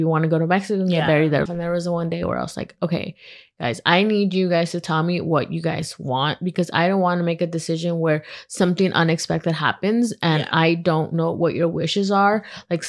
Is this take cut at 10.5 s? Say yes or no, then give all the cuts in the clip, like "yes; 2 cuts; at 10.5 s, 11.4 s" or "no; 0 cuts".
no; 1 cut; at 1.5 s